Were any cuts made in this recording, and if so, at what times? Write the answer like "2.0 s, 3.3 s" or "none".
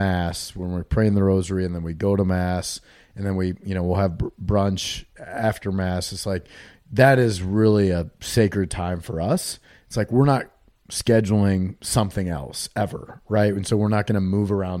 none